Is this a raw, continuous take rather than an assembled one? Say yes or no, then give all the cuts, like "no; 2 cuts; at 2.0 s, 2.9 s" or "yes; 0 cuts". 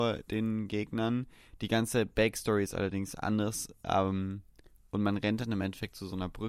yes; 0 cuts